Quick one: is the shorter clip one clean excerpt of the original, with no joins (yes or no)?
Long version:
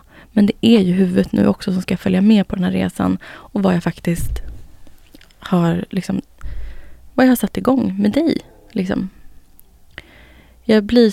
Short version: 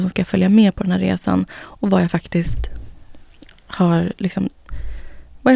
yes